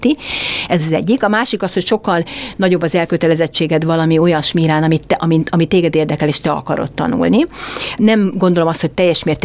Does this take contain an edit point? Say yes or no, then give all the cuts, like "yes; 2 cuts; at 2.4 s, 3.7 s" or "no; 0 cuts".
yes; 1 cut; at 8.0 s